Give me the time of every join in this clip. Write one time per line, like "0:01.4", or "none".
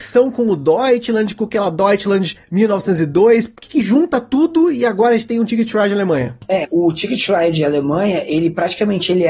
0:06.6